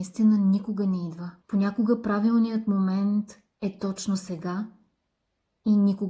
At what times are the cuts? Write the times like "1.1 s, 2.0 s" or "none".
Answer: 1.4 s